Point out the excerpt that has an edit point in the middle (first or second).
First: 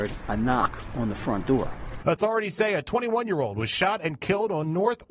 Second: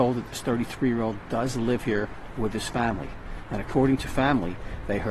first